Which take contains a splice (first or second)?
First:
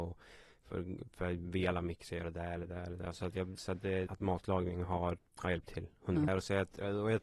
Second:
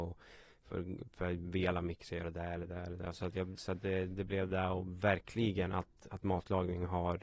first